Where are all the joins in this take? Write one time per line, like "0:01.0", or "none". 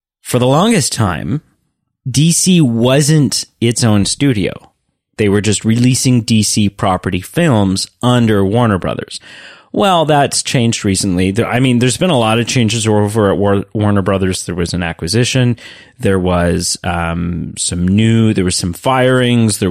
none